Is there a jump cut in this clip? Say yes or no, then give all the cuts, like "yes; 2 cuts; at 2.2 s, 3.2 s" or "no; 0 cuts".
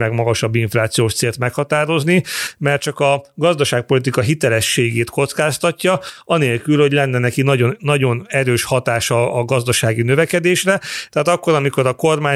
yes; 1 cut; at 11.1 s